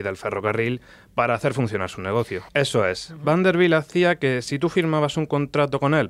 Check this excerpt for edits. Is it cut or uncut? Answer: cut